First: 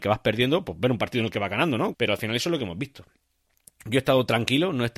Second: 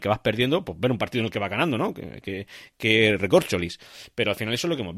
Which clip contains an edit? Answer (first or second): first